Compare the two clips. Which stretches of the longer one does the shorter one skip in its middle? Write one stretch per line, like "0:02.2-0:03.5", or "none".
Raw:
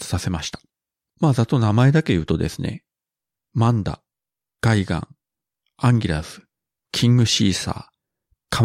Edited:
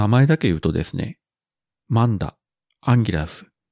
0:04.3-0:05.7